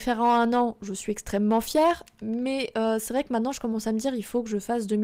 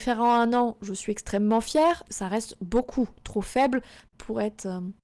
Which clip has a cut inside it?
second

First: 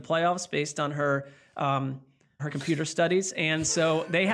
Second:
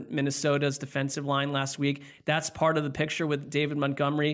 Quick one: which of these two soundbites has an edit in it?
first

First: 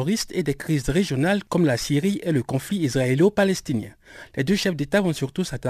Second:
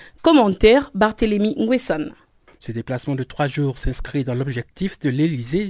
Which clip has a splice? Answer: second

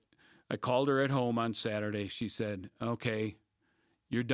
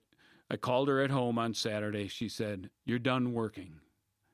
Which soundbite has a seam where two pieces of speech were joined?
second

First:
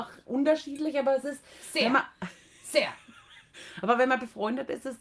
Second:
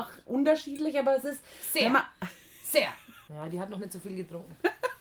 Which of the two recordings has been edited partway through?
second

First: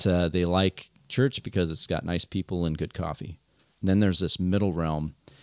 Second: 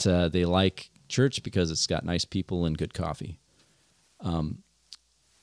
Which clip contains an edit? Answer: first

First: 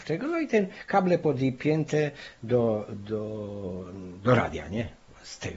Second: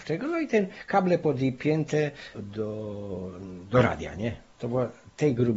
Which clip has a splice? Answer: second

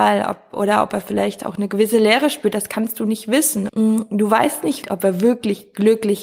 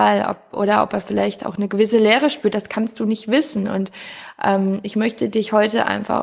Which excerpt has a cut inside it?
first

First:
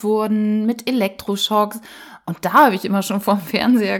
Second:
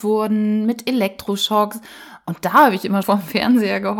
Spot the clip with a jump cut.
second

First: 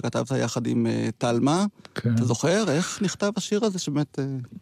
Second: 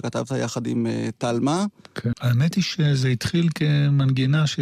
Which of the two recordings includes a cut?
second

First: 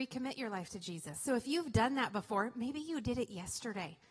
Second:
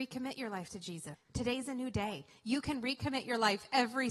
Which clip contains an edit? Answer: second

